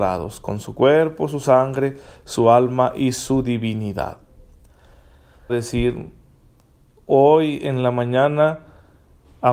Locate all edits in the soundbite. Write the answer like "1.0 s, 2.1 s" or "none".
5.5 s